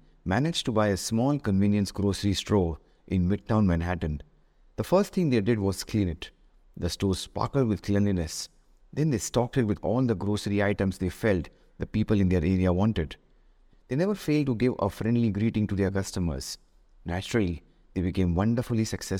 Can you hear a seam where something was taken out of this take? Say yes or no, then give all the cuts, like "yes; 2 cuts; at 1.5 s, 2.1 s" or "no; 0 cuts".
yes; 1 cut; at 13.7 s